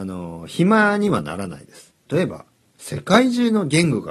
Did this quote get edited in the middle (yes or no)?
yes